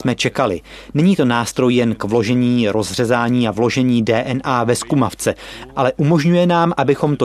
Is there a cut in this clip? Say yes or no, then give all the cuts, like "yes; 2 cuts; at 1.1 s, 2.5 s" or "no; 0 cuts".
no; 0 cuts